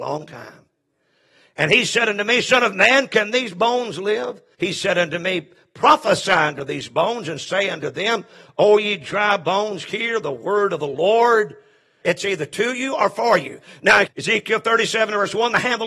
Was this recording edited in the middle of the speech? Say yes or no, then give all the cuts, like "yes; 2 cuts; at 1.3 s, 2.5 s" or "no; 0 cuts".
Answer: yes; 3 cuts; at 4.5 s, 12.0 s, 14.1 s